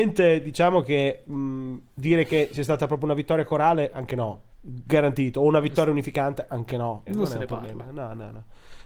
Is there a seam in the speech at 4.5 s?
yes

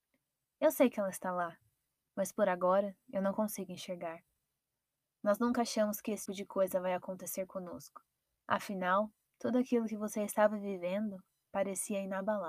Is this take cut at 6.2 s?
yes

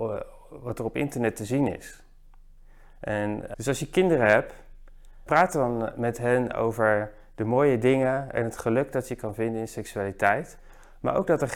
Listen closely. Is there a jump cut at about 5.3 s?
yes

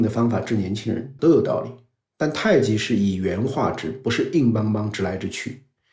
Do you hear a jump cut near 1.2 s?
yes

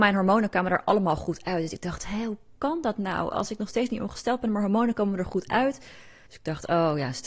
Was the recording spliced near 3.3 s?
no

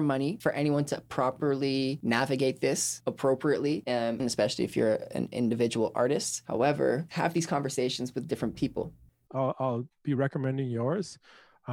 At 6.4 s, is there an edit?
no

